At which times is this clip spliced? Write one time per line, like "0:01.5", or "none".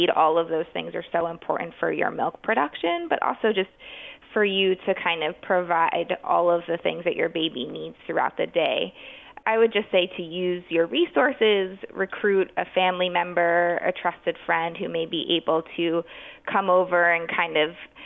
none

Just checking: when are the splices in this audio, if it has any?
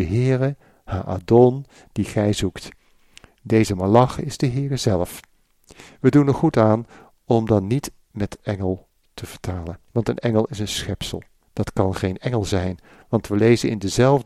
0:09.9
0:11.4

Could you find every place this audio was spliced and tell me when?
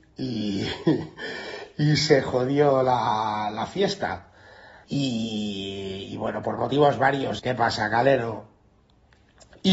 0:04.8
0:07.4

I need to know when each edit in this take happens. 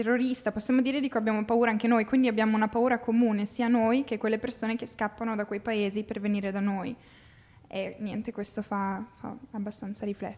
none

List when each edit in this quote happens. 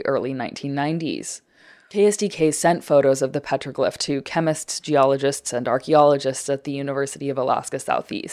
none

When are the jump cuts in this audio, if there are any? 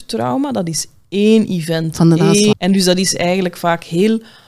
0:02.5

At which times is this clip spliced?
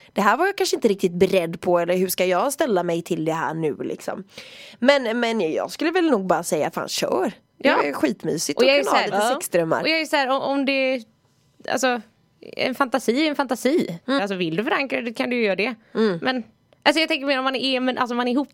0:14.2

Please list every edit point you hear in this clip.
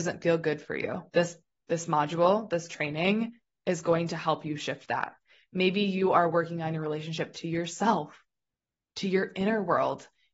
0:01.1

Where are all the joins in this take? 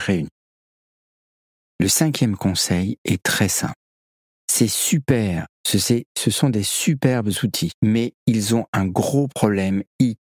0:04.3
0:07.8

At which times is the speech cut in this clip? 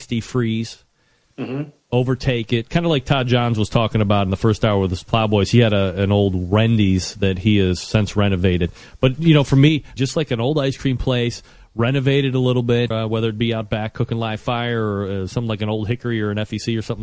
0:10.0
0:12.9

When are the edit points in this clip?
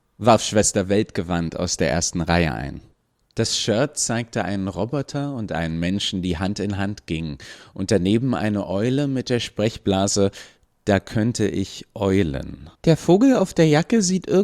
0:03.2
0:12.7

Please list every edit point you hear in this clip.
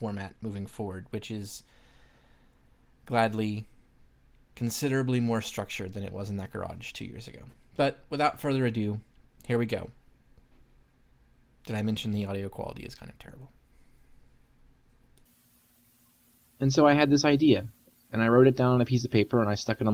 none

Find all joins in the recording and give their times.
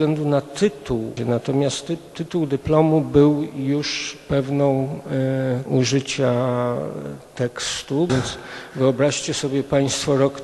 0:01.2
0:05.7
0:08.1

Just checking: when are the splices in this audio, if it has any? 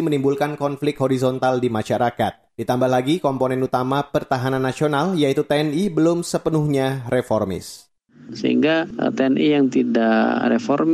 0:02.5

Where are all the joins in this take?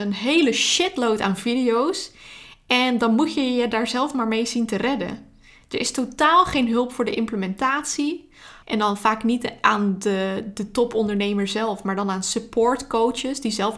0:08.6

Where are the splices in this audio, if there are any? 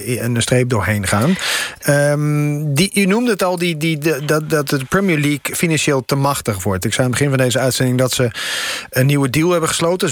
none

